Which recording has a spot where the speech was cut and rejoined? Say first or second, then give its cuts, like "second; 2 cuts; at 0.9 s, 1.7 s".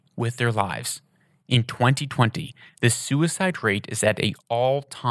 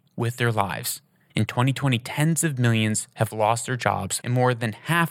second; 2 cuts; at 1.3 s, 4.2 s